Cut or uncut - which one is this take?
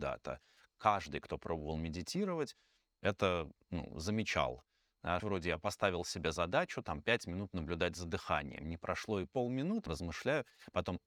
cut